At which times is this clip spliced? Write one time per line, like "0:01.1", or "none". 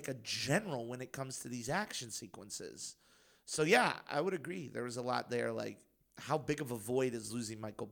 0:04.1

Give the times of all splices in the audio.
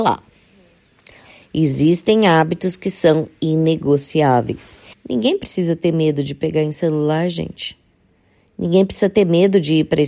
0:04.9

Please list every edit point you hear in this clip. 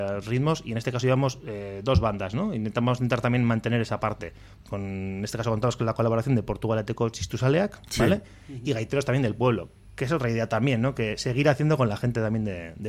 0:04.6

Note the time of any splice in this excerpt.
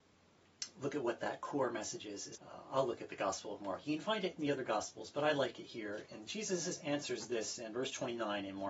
0:02.3
0:06.0

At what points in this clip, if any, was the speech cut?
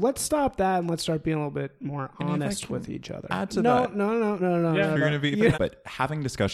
0:04.4
0:05.5

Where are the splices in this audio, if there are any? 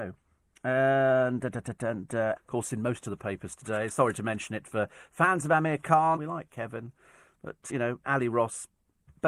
0:02.4
0:06.2
0:07.7

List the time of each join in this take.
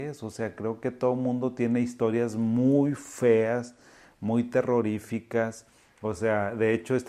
none

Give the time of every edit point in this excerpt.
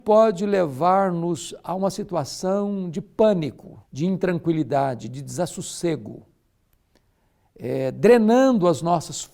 0:03.8

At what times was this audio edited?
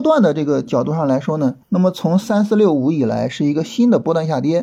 0:01.6

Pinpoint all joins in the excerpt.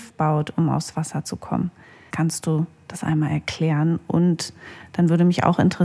0:02.1

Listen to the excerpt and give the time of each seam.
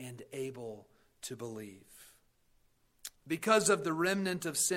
0:03.1

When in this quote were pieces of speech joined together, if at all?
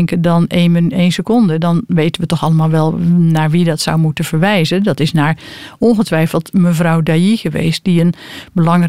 none

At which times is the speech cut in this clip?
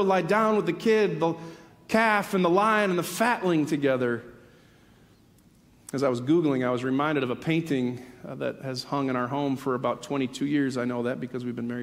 none

